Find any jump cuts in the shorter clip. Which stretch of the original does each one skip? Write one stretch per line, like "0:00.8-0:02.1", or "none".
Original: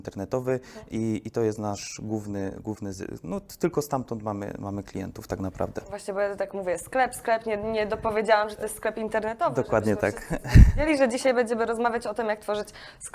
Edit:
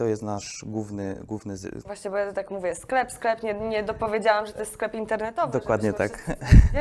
0:03.2-0:05.9